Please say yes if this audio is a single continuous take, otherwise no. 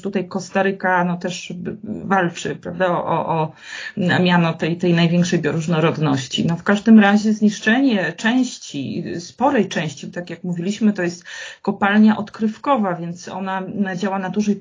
yes